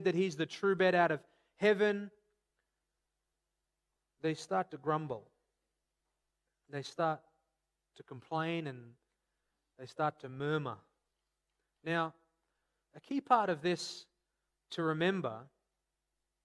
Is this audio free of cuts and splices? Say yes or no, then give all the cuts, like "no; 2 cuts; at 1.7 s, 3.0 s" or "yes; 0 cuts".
yes; 0 cuts